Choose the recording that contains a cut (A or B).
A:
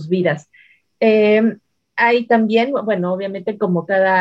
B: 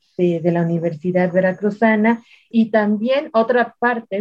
B